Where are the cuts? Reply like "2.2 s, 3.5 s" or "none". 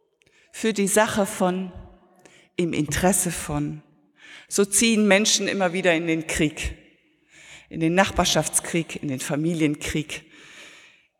none